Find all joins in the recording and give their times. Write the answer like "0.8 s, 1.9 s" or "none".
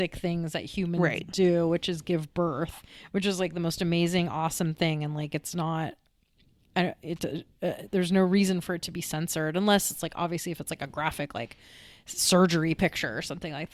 none

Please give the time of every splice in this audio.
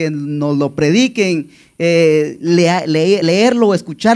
none

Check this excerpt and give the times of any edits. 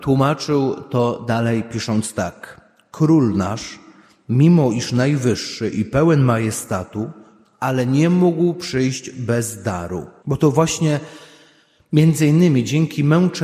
7.4 s, 10.2 s

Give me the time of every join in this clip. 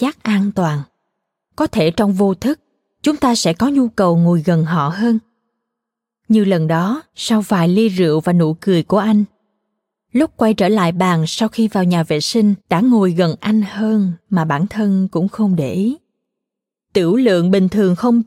7.1 s, 12.6 s

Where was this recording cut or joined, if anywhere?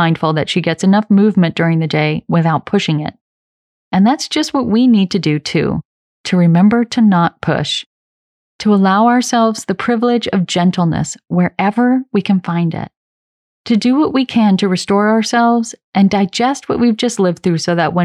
none

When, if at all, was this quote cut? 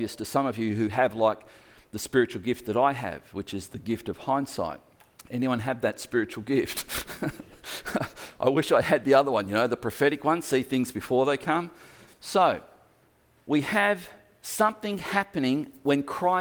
12.1 s

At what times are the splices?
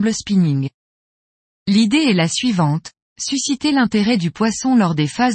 1.5 s

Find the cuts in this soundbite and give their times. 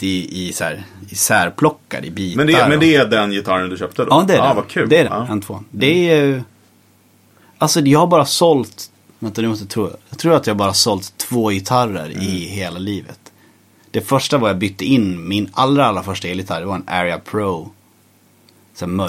5.0 s

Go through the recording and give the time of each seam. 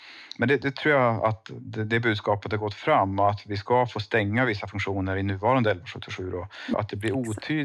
6.7 s

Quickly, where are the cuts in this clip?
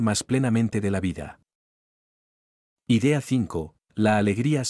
none

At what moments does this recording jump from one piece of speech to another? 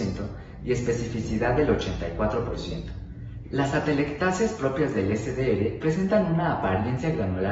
3.4 s

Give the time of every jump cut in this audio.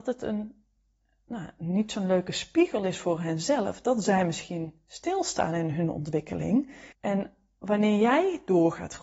6.9 s

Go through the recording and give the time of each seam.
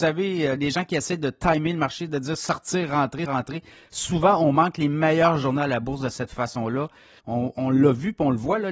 3.3 s, 7.2 s

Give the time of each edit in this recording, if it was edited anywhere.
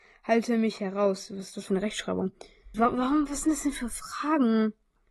2.7 s

